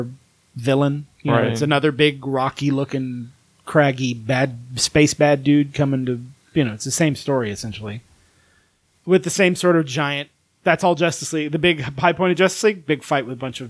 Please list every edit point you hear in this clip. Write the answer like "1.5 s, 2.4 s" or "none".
none

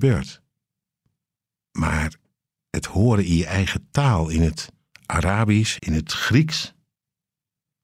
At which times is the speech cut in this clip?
1.7 s, 5.8 s

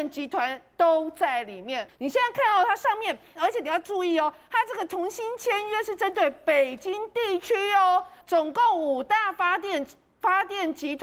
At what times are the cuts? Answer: 1.9 s, 3.4 s, 8.2 s

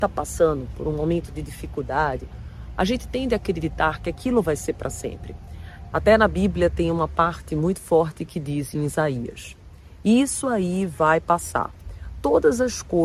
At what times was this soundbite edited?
2.7 s, 5.9 s

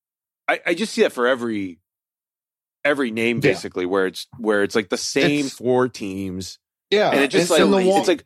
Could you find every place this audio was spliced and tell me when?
none

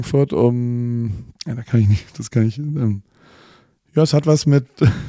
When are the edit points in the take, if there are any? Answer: 1.4 s

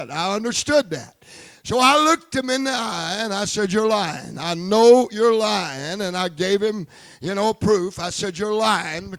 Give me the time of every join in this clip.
none

